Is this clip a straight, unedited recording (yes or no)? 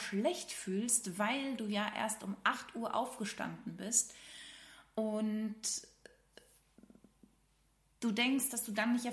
yes